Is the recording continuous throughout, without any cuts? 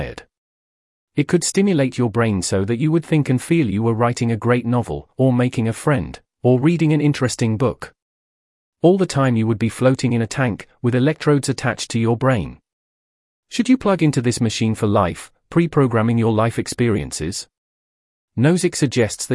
yes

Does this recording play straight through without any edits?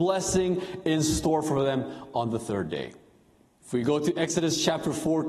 no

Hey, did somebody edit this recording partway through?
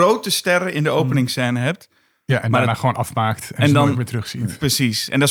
no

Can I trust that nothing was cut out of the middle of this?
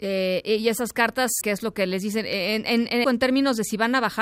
no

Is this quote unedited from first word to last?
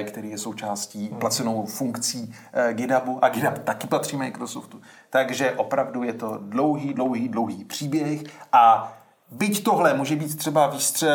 yes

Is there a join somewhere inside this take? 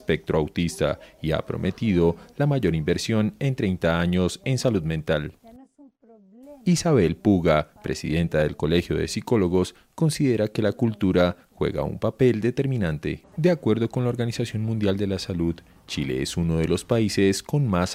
yes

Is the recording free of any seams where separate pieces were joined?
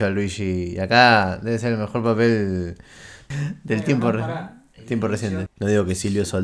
no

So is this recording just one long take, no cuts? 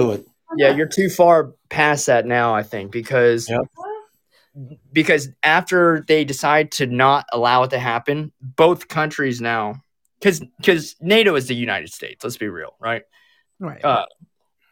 yes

